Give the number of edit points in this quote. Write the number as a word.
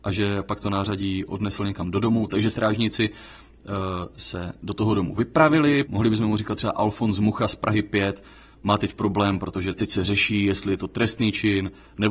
one